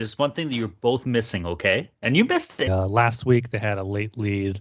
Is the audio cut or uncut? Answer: cut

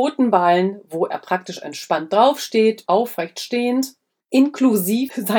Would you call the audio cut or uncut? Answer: cut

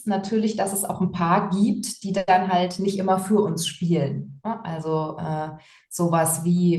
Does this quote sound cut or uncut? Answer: uncut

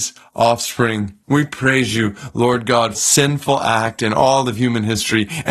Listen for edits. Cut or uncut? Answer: cut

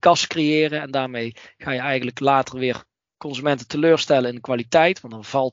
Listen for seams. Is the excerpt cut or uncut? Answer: uncut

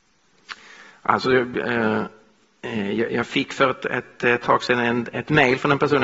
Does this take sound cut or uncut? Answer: uncut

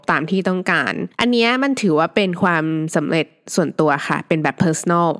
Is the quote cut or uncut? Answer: cut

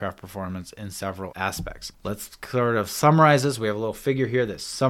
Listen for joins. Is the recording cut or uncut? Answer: uncut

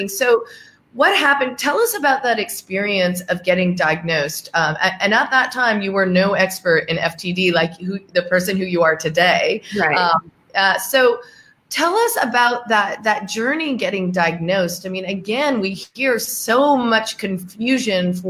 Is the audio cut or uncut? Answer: uncut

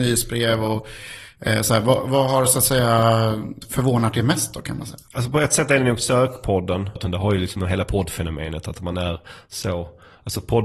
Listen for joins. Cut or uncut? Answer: cut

